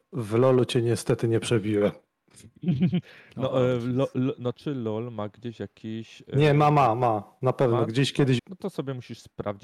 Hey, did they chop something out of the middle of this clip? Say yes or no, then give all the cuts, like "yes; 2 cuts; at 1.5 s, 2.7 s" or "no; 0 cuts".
yes; 2 cuts; at 4.5 s, 8.4 s